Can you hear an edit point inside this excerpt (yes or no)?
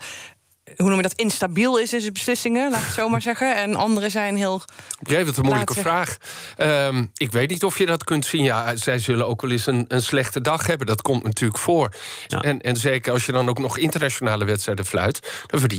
yes